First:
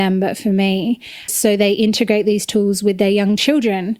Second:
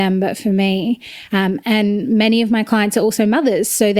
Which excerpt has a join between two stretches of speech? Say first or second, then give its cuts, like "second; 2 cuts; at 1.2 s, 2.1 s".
first; 1 cut; at 1.3 s